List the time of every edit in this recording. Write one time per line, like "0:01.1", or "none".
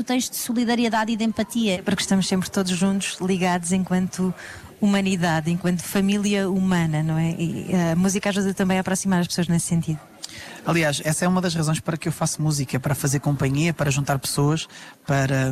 0:01.7